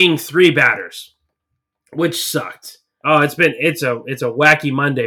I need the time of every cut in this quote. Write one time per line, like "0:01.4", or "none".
0:03.0